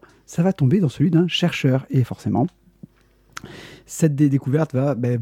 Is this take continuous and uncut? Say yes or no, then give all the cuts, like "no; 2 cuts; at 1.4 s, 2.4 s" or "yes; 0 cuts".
yes; 0 cuts